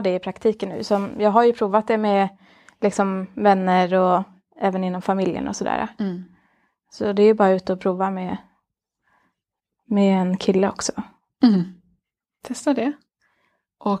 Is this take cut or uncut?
uncut